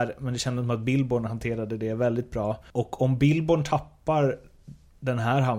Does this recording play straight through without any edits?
no; 1 cut; at 2.7 s

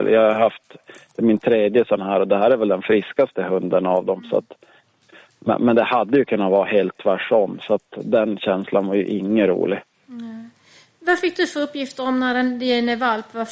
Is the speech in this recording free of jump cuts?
yes; 0 cuts

